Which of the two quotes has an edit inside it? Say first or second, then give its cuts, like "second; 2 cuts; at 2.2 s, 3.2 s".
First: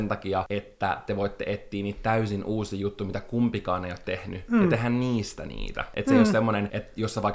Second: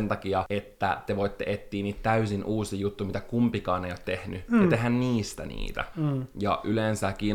second; 1 cut; at 5.9 s